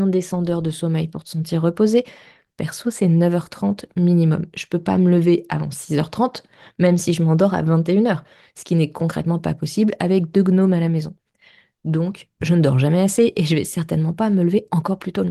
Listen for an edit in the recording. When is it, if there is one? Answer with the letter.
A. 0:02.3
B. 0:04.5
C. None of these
C